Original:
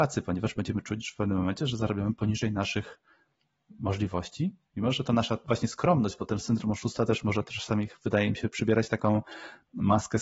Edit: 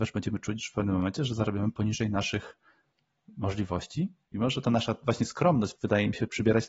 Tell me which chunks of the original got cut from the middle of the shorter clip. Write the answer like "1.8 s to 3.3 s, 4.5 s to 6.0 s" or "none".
6.2 s to 8.0 s